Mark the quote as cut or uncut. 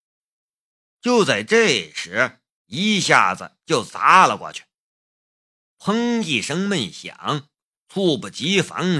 cut